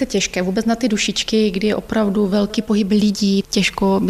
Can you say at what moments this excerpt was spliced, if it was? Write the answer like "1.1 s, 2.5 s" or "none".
none